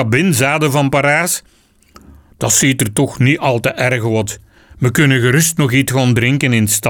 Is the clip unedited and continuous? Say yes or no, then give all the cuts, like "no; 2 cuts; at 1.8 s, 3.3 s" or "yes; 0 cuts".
yes; 0 cuts